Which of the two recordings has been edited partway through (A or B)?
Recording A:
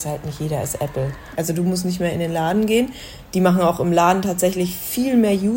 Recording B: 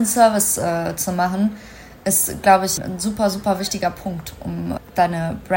A